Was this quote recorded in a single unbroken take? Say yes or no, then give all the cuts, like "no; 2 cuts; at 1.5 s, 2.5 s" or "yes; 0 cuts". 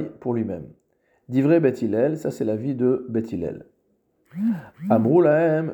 yes; 0 cuts